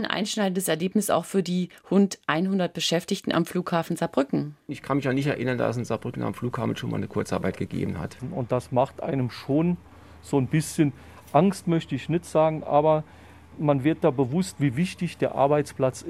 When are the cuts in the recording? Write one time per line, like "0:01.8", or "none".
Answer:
none